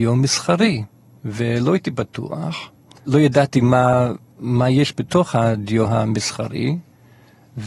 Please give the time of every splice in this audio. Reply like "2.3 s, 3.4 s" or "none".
none